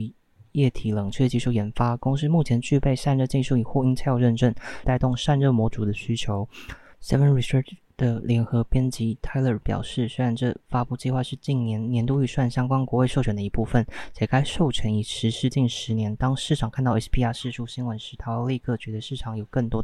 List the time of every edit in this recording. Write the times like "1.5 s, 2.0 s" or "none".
4.8 s, 6.9 s